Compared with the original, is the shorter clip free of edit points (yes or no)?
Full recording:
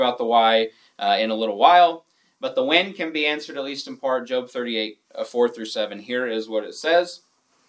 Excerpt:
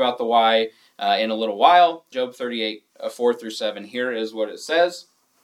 no